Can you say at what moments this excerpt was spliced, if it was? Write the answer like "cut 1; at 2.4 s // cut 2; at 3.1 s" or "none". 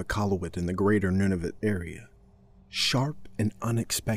cut 1; at 2.6 s